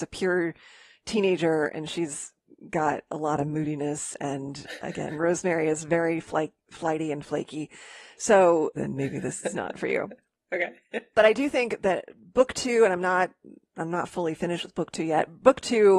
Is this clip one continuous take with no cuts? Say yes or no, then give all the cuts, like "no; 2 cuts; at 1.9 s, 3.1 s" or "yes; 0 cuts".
no; 1 cut; at 8.7 s